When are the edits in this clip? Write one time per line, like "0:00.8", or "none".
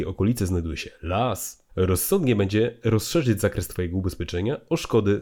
0:01.7